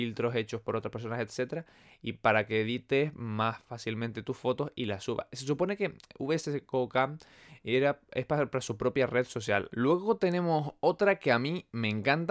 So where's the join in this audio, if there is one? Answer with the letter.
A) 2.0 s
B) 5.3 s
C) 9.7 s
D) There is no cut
C